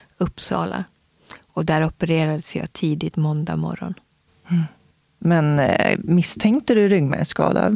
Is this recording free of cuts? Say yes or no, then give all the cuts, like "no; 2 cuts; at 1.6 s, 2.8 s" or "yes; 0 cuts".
yes; 0 cuts